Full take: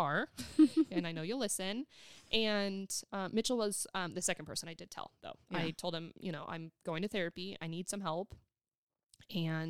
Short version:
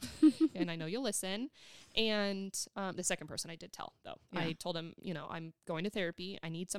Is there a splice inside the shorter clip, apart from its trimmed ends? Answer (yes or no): yes